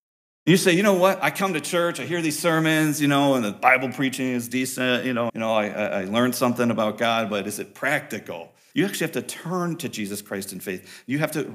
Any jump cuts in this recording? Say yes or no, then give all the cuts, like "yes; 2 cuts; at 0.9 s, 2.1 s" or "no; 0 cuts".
yes; 2 cuts; at 5.3 s, 8.7 s